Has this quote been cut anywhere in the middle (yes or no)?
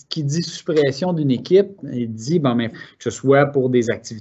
yes